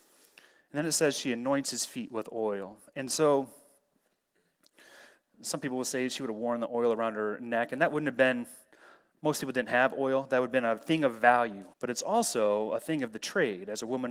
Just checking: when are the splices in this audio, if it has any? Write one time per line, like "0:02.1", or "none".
0:11.7